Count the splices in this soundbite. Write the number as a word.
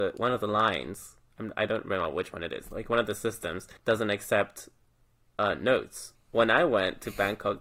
two